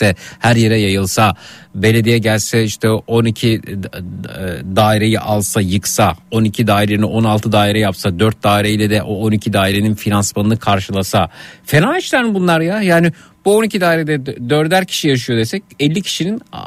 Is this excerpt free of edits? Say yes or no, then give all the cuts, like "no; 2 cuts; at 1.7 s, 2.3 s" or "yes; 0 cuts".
yes; 0 cuts